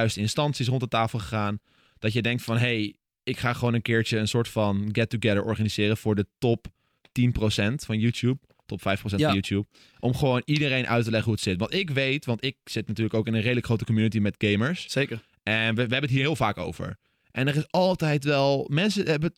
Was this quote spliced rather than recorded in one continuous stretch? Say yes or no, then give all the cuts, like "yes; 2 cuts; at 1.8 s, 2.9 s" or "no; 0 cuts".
no; 0 cuts